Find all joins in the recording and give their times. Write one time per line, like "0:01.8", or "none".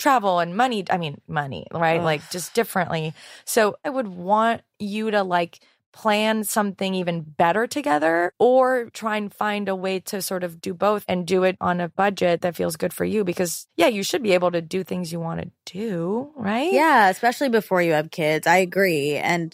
none

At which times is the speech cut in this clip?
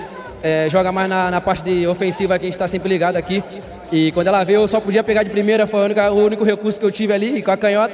none

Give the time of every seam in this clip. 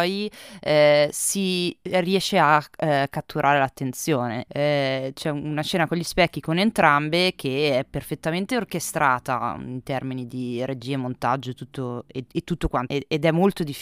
0:04.5
0:12.9

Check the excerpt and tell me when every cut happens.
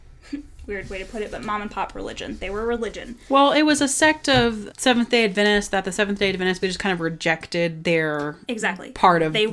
0:04.7
0:06.6

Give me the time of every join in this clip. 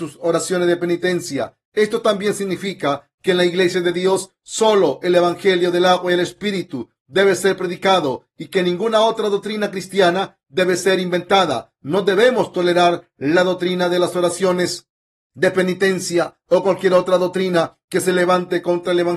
none

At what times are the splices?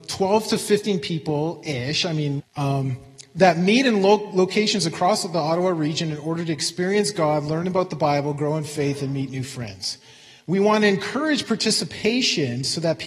0:02.4

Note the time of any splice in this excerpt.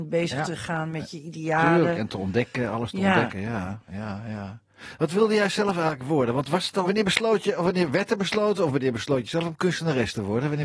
0:06.8

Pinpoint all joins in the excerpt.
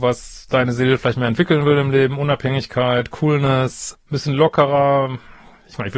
0:03.9

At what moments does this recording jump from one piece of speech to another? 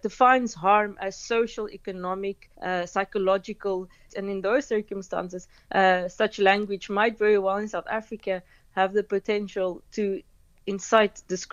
0:02.5
0:04.1

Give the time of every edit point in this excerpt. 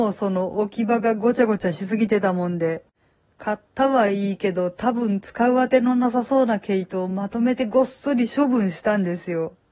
none

